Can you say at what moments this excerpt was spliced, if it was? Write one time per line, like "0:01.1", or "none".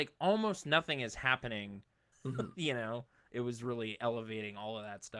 0:02.1